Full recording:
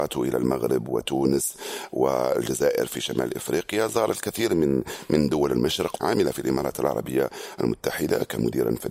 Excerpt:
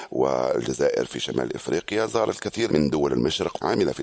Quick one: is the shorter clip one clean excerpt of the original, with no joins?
no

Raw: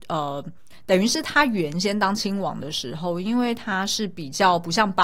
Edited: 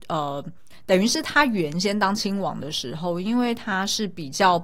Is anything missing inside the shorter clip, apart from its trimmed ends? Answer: no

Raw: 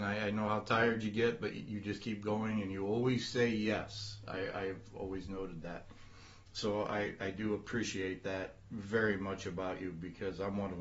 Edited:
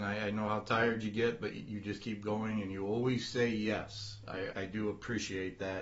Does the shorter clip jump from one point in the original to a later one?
yes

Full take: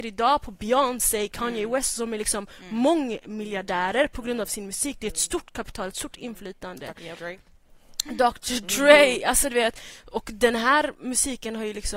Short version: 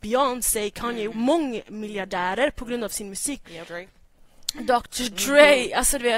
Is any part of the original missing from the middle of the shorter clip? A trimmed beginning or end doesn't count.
yes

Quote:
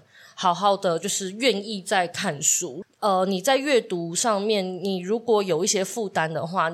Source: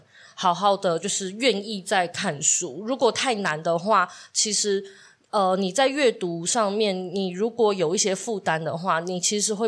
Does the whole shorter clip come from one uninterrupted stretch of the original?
no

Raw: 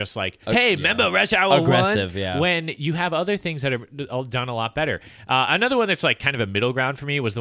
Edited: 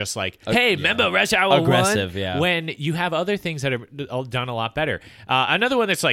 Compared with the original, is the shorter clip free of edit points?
yes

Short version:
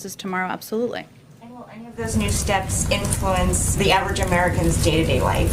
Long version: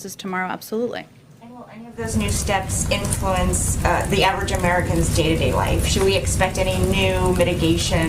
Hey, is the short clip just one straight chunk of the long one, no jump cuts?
no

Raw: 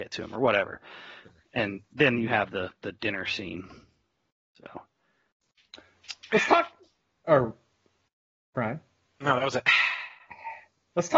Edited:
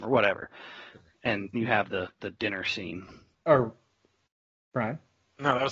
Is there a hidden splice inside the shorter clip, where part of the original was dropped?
yes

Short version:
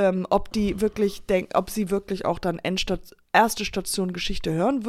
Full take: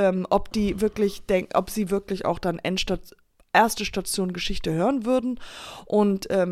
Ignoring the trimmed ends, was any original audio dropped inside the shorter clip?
yes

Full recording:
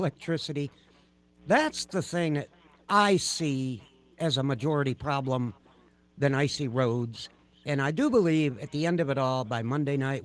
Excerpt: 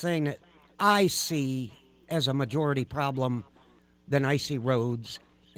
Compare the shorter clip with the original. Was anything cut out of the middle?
no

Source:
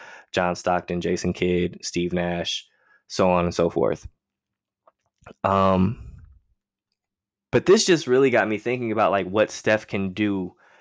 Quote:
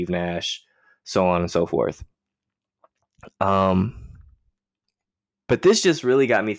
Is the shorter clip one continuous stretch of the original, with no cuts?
yes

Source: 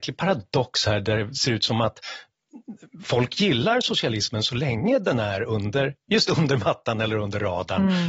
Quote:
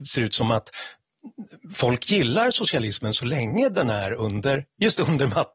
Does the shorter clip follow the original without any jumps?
yes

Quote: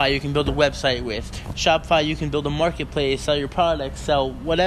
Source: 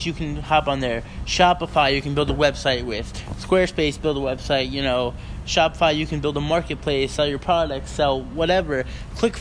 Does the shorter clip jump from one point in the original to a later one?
yes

